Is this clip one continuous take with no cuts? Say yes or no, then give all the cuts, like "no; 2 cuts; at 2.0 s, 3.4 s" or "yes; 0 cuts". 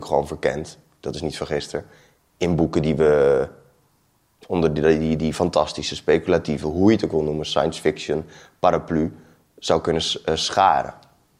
yes; 0 cuts